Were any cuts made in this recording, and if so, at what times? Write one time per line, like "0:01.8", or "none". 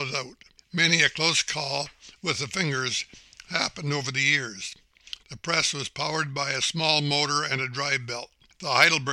0:05.2